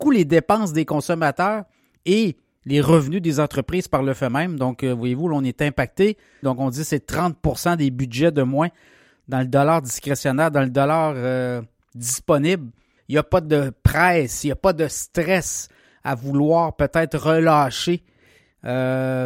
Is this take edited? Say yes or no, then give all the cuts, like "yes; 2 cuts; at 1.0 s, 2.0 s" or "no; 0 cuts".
yes; 2 cuts; at 6.4 s, 13.0 s